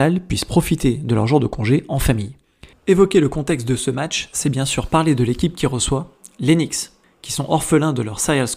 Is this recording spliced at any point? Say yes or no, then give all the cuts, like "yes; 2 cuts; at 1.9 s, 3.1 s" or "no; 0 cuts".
yes; 1 cut; at 2.7 s